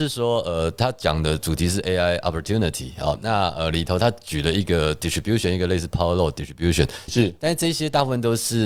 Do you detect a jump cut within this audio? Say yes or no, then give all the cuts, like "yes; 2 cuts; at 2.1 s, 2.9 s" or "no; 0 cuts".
yes; 1 cut; at 7.1 s